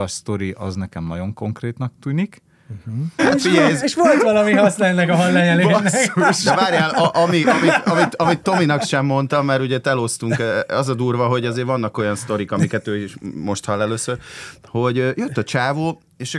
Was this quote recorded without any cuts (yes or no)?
no